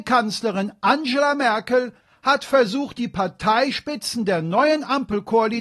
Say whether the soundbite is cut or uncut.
uncut